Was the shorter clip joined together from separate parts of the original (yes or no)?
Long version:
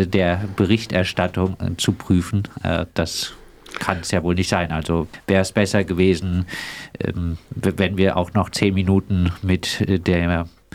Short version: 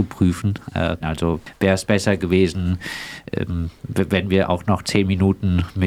yes